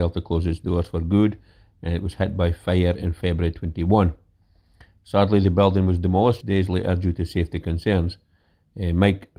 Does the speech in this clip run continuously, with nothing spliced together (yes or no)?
no